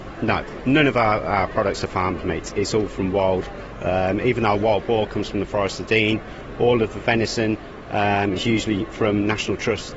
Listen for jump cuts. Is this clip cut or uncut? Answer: uncut